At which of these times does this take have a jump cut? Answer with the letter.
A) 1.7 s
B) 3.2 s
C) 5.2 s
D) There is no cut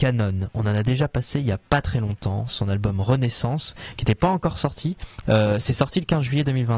C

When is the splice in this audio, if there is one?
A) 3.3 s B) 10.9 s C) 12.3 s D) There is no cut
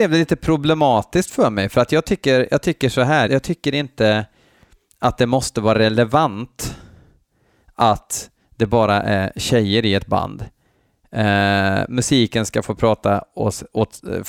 A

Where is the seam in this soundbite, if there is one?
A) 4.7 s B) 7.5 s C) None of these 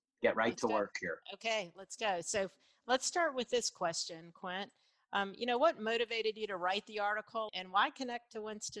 B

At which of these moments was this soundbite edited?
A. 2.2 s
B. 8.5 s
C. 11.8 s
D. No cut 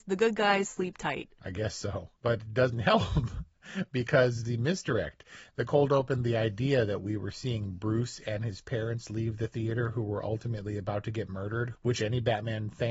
A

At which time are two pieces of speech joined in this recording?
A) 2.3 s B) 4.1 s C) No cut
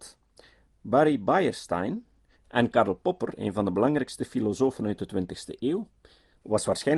A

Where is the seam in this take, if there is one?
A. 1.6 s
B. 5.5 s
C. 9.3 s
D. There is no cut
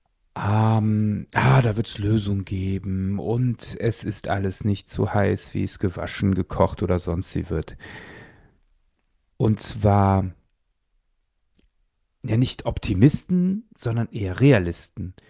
C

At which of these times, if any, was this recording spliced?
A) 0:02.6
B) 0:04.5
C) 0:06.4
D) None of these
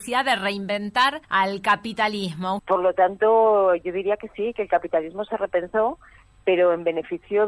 A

